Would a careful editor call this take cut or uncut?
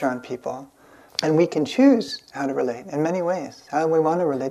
cut